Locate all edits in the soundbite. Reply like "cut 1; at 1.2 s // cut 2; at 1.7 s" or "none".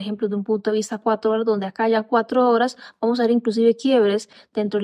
none